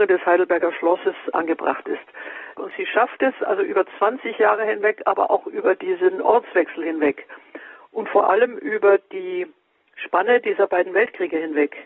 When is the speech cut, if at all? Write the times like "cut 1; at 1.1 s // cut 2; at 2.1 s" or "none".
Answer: cut 1; at 2.6 s